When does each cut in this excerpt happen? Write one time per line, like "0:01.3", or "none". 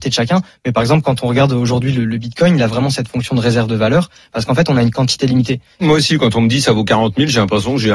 0:05.8